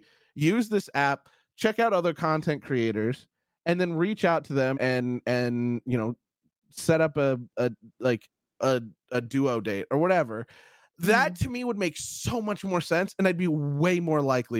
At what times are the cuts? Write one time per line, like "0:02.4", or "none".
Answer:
0:04.7